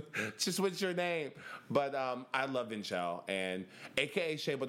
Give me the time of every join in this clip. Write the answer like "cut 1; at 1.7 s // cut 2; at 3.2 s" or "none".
none